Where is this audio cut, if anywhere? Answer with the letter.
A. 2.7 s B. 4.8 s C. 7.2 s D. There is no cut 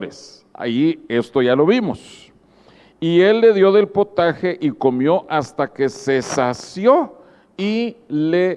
D